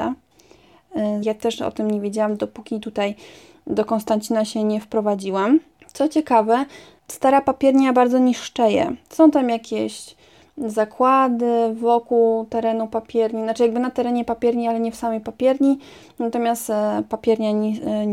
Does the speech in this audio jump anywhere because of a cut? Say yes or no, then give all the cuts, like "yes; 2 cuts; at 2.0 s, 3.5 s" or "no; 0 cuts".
yes; 1 cut; at 1.2 s